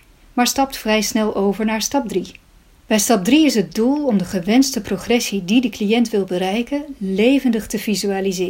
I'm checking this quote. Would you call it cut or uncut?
cut